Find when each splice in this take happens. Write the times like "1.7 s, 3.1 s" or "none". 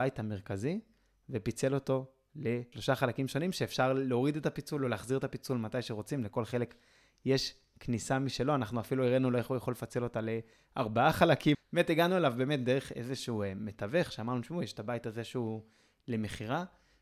11.5 s